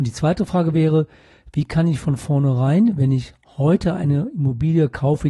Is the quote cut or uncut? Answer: uncut